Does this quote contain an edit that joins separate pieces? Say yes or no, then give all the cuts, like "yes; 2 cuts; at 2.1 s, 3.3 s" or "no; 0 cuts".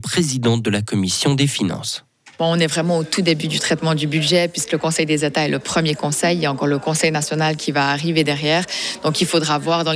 no; 0 cuts